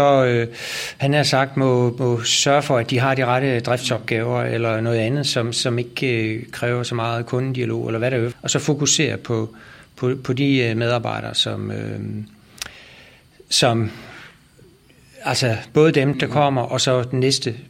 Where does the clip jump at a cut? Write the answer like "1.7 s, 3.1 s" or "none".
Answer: 8.3 s, 16.1 s